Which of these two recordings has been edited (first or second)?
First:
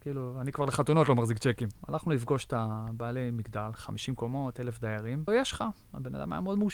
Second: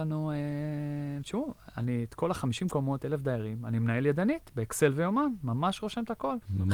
first